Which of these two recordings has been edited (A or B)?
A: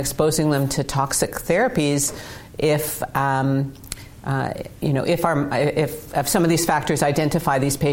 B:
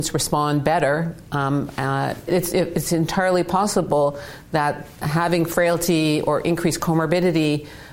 B